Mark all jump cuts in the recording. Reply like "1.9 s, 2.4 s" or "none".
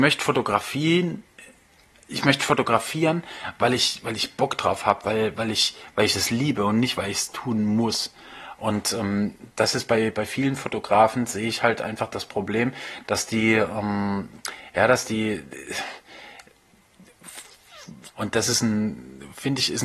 18.1 s